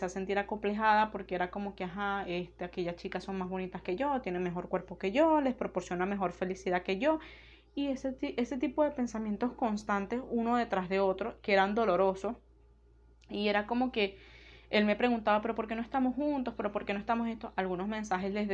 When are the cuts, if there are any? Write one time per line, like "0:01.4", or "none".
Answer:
none